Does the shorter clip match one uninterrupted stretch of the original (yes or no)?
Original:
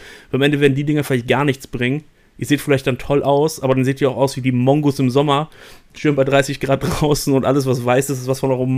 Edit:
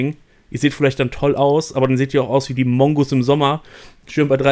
yes